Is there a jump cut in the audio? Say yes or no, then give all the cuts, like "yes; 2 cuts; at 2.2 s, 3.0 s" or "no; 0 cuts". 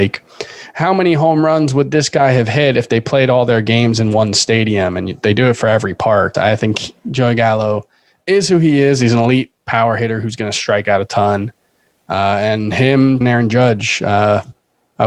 yes; 2 cuts; at 6.3 s, 13.2 s